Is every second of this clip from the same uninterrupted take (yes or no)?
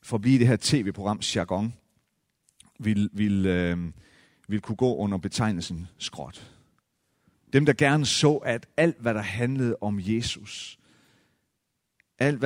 no